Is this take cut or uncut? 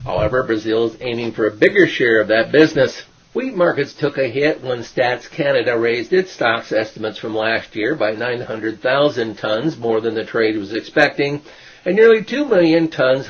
uncut